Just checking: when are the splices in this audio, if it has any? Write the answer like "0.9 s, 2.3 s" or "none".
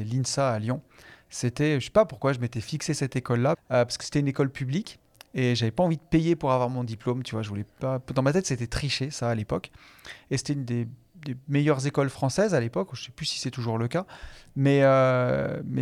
3.5 s